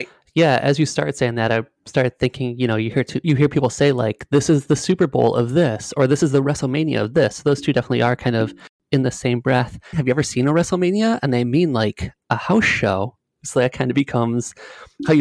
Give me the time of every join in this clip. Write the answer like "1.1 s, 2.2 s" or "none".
9.9 s, 13.3 s